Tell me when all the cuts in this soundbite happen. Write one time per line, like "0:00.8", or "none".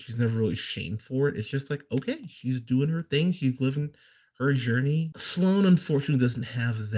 0:05.1